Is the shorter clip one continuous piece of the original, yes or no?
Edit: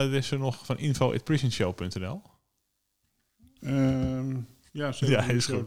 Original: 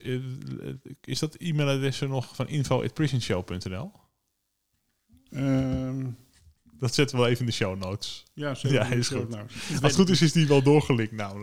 no